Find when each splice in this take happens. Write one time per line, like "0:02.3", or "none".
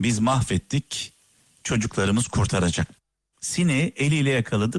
0:03.3